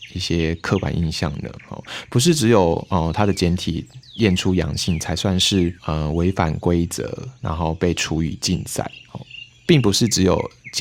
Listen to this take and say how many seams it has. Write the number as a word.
one